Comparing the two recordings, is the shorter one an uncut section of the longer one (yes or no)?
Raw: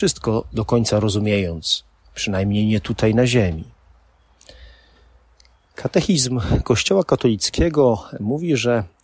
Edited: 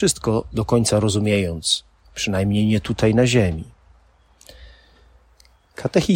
yes